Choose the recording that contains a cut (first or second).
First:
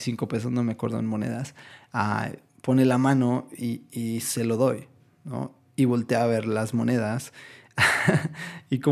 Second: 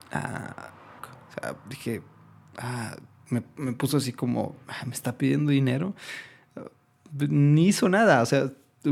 second